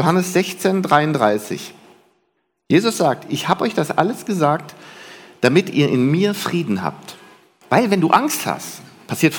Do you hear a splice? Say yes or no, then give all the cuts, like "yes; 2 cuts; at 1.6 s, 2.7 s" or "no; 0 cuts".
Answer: yes; 1 cut; at 7.6 s